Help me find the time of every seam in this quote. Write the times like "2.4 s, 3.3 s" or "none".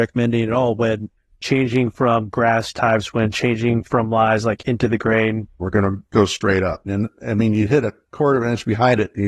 5.6 s, 6.9 s